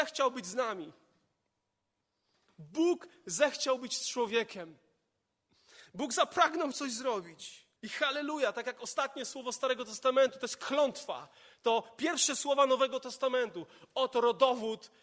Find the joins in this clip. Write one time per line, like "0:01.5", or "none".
0:07.8